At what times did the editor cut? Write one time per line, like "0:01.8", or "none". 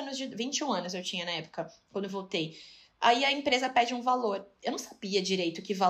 none